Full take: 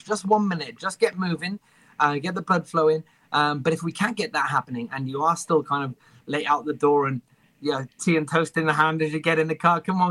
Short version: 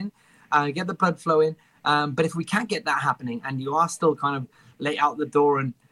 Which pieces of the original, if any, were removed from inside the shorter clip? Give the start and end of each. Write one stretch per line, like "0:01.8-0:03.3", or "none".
none